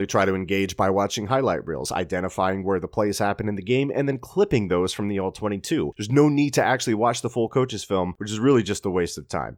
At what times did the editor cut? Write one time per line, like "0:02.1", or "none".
none